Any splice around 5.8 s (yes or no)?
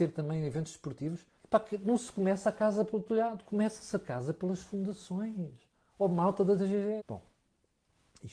no